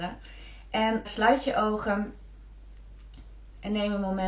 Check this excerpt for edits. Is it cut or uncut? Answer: cut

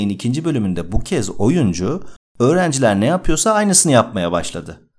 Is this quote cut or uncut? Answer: uncut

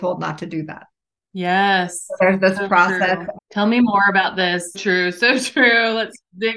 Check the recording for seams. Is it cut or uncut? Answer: cut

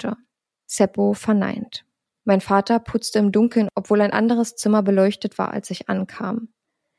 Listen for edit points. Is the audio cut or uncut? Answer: cut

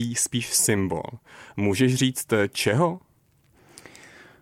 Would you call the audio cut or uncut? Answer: uncut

